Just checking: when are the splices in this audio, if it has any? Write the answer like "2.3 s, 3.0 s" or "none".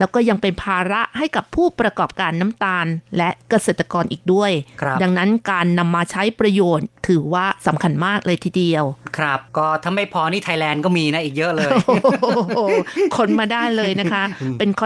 9.5 s